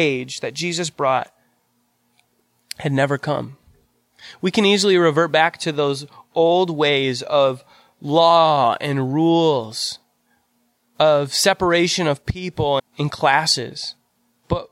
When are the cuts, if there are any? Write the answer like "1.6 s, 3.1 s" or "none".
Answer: 12.8 s